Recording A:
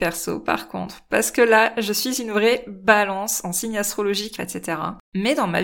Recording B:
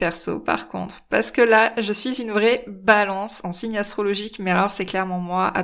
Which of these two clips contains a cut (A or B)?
A